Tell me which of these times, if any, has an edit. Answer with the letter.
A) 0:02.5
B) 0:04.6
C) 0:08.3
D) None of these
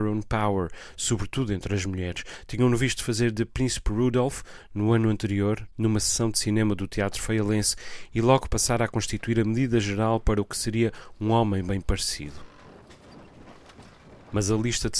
D